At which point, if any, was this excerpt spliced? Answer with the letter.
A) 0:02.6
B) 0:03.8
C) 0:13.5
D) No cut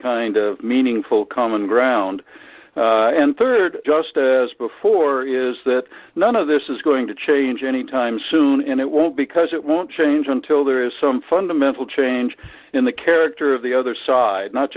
B